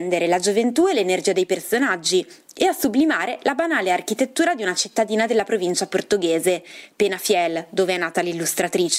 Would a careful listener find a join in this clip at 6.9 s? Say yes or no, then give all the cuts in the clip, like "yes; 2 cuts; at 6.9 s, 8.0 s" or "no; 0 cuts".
no; 0 cuts